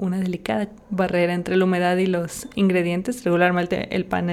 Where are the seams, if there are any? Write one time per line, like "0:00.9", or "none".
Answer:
none